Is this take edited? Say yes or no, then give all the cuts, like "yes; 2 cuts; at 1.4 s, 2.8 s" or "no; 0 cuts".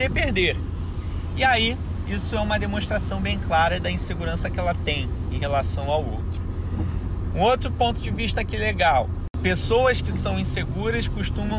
no; 0 cuts